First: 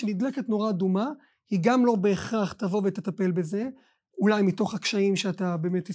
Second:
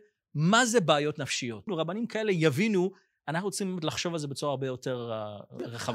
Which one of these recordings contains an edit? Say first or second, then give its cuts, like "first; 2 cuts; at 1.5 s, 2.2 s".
second; 1 cut; at 1.7 s